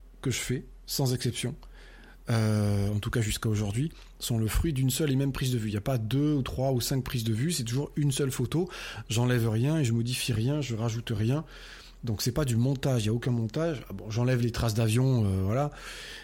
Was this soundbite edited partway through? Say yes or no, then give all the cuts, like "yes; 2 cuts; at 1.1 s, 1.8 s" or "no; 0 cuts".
no; 0 cuts